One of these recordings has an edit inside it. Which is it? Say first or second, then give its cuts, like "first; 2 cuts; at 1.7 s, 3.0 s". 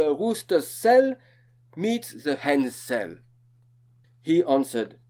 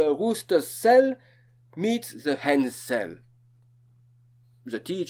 first; 1 cut; at 4.0 s